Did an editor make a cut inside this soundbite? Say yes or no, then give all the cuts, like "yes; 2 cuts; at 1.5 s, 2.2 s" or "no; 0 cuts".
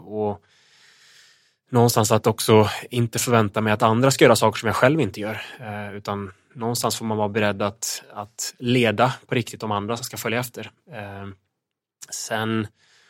no; 0 cuts